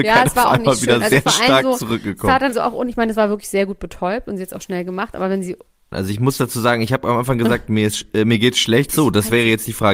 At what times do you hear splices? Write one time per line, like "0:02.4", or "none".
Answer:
0:02.5
0:05.9
0:08.9